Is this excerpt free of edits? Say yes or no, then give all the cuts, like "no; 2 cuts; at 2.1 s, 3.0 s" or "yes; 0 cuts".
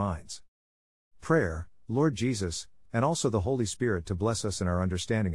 no; 1 cut; at 2.9 s